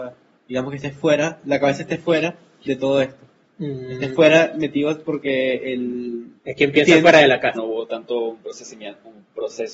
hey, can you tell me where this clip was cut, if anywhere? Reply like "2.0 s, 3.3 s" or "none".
6.4 s, 7.5 s